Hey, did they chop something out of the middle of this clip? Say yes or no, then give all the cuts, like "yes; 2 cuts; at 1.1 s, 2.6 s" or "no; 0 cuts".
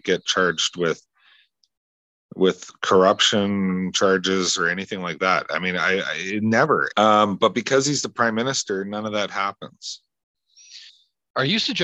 yes; 1 cut; at 6.9 s